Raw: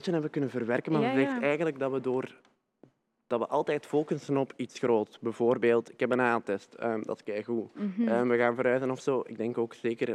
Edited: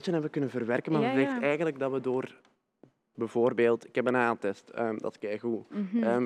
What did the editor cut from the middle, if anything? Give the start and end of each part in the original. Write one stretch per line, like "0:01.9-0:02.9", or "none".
0:03.1-0:05.2